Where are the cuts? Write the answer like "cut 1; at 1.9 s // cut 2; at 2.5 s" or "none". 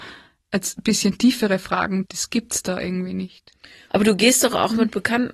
cut 1; at 2.0 s // cut 2; at 3.9 s